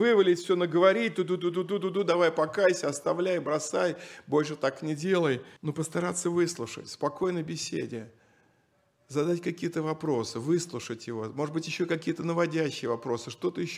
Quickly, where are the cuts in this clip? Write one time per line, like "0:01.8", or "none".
0:05.6